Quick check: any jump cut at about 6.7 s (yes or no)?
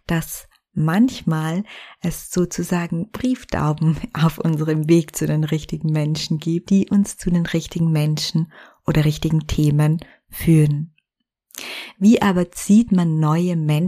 yes